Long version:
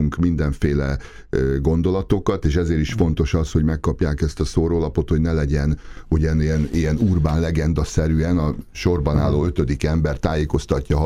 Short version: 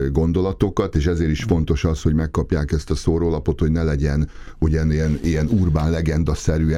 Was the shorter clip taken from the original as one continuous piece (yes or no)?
yes